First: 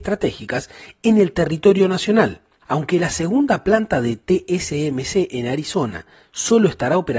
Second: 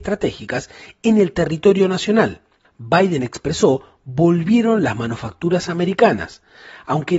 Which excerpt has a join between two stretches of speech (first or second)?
first